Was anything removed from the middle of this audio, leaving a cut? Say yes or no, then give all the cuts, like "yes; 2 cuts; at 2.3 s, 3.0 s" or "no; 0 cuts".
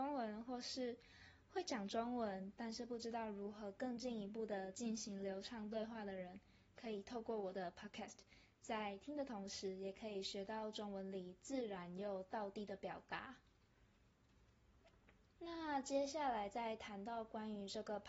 no; 0 cuts